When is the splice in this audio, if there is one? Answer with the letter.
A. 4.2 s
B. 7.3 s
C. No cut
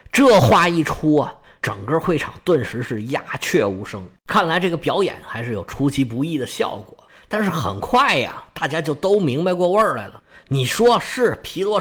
C